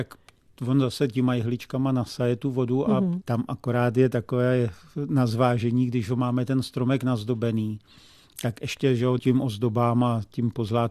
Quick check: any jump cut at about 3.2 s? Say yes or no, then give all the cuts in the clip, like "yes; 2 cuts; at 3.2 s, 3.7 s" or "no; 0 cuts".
yes; 2 cuts; at 3.2 s, 9.2 s